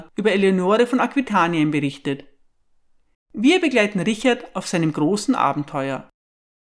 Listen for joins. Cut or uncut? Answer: cut